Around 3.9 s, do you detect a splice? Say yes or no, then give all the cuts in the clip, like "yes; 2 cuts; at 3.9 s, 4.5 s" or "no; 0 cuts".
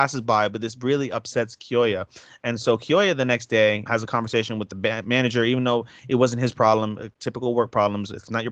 yes; 1 cut; at 3.9 s